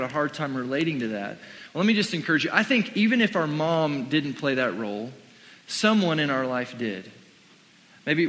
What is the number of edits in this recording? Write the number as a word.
zero